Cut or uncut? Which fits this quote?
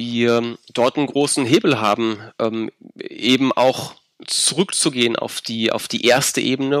uncut